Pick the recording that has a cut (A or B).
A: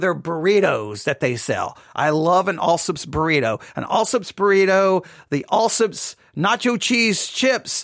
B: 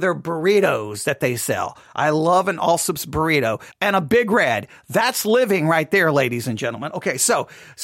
B